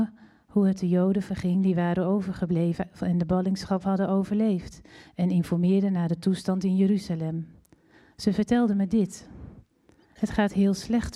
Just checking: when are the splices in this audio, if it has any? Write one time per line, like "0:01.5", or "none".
none